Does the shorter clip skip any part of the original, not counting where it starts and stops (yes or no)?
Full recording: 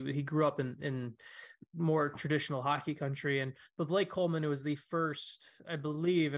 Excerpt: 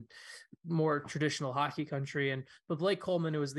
no